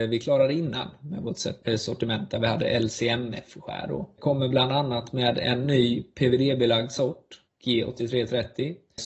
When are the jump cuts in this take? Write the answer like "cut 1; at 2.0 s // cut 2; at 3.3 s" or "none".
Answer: none